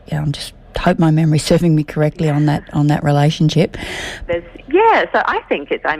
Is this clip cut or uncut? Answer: cut